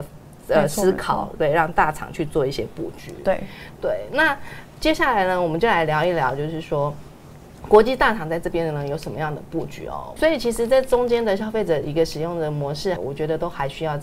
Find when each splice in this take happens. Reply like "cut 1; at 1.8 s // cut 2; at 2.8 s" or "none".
cut 1; at 10.2 s // cut 2; at 13.0 s